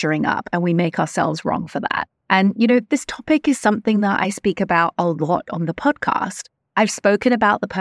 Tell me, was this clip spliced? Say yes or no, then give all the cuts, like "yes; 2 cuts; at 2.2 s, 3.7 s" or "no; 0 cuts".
no; 0 cuts